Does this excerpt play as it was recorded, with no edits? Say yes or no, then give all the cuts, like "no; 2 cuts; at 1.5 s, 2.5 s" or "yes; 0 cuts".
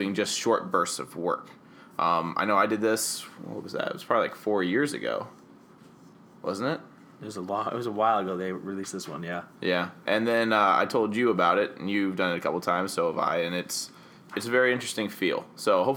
no; 1 cut; at 14.3 s